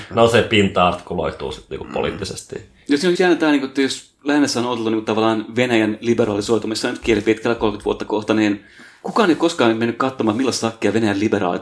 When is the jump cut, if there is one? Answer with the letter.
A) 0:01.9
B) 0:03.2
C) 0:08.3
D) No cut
B